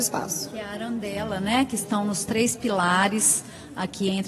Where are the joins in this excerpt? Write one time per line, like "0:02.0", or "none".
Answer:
none